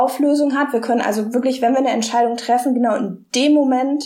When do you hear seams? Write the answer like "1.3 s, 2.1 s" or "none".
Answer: none